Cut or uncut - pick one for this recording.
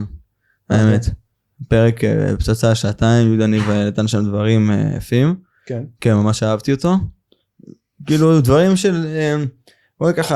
uncut